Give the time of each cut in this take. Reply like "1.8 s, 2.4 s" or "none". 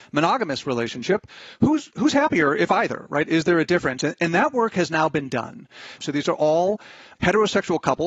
6.0 s